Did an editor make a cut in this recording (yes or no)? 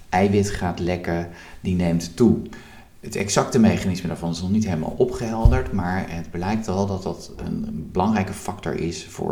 no